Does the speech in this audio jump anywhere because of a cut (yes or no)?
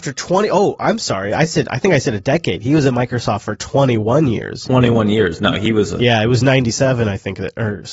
no